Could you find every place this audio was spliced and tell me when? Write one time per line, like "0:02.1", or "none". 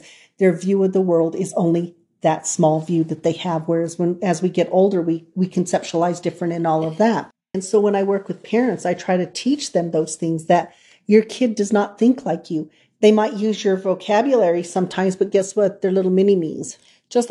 0:07.5